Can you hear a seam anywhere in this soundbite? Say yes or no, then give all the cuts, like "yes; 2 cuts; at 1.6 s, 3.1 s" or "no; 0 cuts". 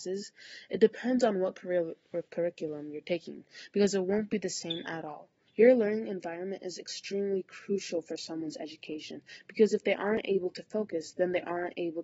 yes; 1 cut; at 5.5 s